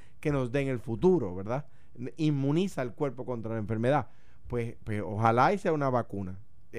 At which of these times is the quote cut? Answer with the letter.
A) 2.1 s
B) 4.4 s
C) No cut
C